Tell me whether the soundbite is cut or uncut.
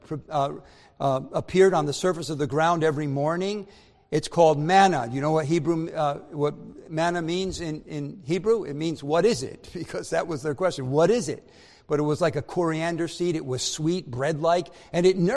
uncut